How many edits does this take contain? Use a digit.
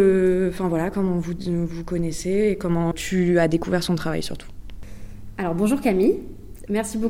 1